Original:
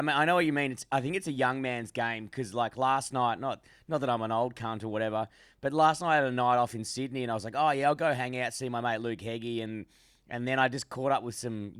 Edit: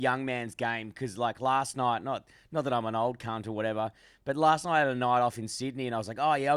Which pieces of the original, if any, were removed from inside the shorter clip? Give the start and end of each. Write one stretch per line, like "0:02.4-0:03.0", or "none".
none